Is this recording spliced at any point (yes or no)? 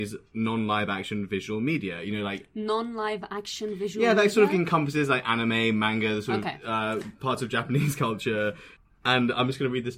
no